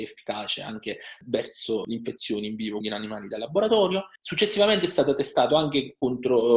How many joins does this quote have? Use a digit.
2